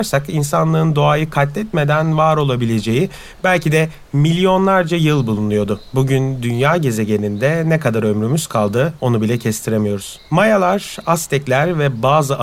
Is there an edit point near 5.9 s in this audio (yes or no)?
no